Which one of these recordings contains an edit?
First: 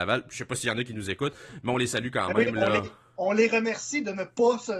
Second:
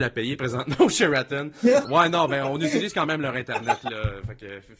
second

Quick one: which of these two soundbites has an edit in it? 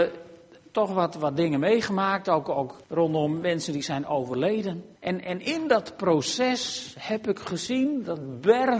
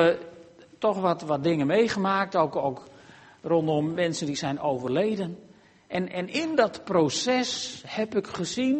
first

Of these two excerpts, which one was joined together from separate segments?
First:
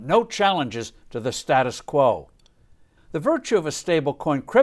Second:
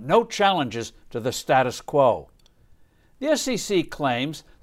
first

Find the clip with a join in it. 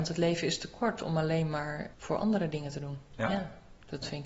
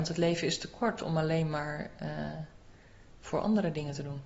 first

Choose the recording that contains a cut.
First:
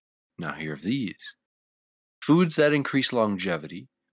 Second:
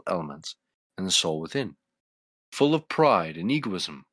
second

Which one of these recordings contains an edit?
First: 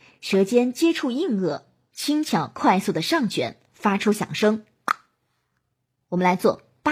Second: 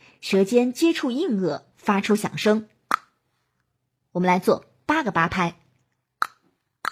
second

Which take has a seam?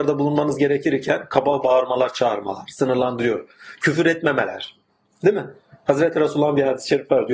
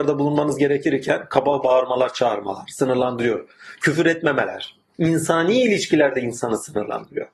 second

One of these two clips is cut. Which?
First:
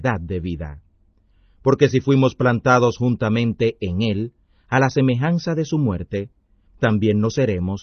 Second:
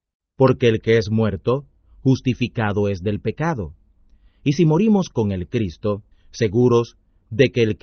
second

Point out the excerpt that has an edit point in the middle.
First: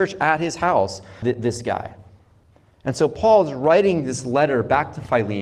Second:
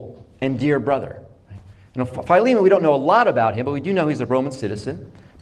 first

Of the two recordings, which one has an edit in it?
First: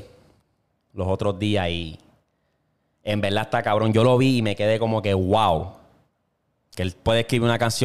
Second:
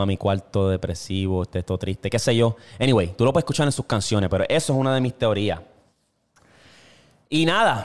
first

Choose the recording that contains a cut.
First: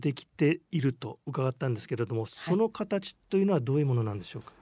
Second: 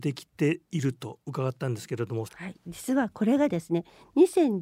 second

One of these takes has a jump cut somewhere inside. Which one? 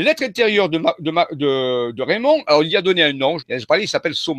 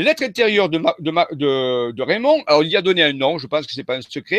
first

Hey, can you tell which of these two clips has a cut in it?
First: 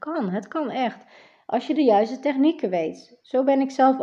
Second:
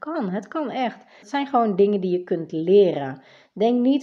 second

